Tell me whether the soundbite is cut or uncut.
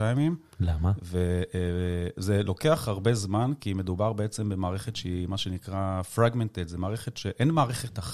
uncut